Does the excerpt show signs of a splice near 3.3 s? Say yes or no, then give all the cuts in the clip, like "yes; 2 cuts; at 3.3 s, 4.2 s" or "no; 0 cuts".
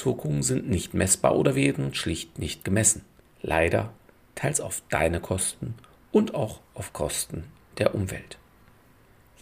yes; 1 cut; at 3.3 s